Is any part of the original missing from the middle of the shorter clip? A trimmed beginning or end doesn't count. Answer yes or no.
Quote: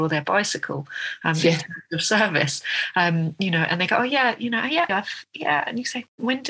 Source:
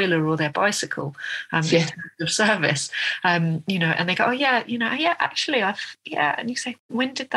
yes